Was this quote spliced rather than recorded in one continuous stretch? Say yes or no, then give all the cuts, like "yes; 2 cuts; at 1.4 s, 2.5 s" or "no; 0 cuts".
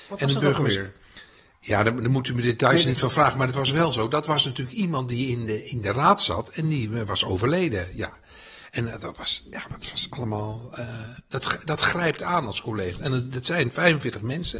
no; 0 cuts